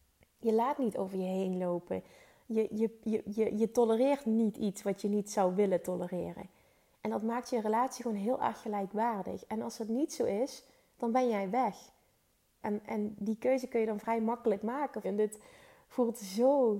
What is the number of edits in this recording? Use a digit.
2